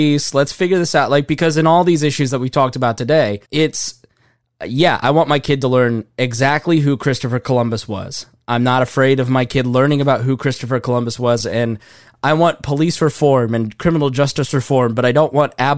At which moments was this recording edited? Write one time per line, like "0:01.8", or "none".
0:03.4
0:11.4